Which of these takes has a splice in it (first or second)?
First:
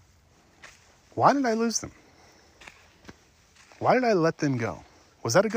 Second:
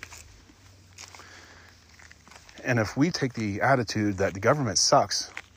second